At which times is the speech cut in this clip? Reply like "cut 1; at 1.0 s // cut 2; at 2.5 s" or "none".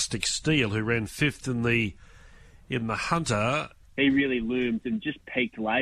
cut 1; at 3.9 s

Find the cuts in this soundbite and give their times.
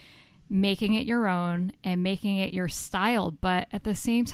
none

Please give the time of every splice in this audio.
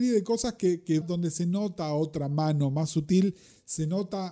cut 1; at 1.0 s

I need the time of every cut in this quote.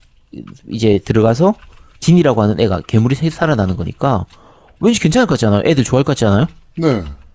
none

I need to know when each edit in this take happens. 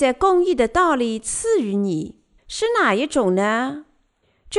cut 1; at 2.4 s

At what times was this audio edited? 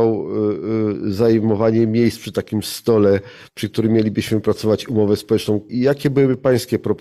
cut 1; at 5.7 s

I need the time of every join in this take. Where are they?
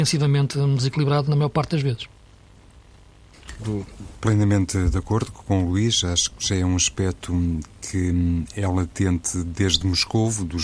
cut 1; at 3.6 s

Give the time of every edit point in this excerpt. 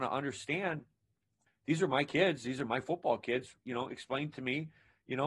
cut 1; at 1.5 s

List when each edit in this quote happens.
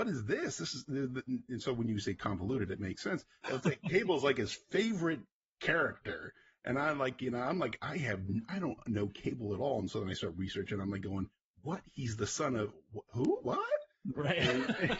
cut 1; at 3.4 s

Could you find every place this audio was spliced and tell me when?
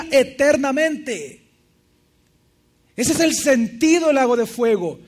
none

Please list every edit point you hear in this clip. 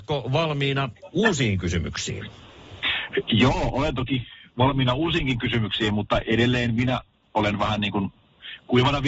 none

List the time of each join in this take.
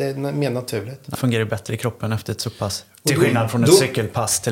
cut 1; at 1.1 s

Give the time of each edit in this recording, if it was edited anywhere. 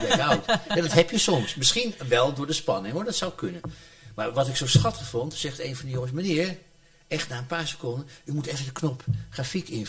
none

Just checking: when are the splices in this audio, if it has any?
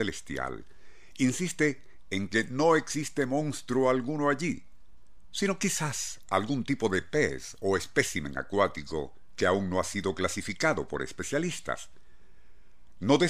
none

